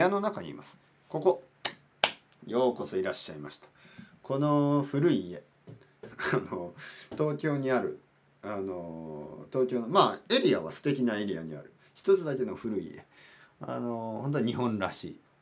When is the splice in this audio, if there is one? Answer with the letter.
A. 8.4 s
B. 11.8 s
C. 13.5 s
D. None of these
B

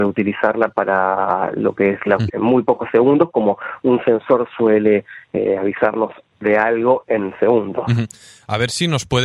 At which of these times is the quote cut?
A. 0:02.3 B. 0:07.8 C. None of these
A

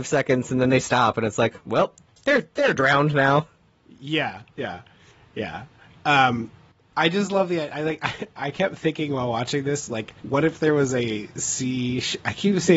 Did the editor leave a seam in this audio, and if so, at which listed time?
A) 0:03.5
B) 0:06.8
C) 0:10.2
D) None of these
C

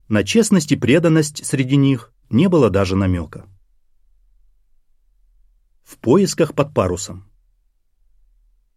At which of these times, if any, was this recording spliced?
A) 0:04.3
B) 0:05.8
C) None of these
C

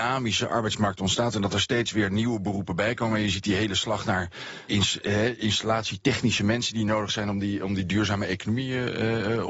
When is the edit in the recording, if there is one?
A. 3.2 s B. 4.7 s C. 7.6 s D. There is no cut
B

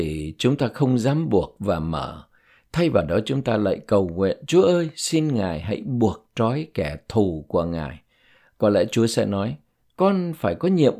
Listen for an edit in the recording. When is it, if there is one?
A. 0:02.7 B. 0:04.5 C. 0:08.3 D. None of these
D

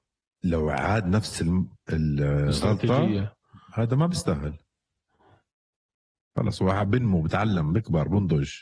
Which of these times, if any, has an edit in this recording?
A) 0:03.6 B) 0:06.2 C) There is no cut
C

